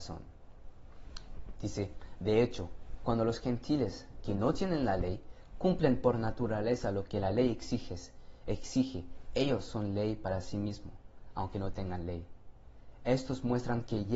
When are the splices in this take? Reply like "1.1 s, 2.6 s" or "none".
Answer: 1.6 s